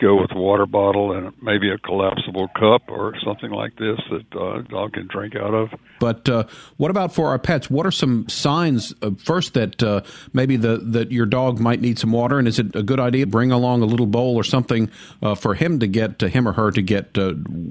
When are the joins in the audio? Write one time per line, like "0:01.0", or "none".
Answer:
0:06.0
0:13.2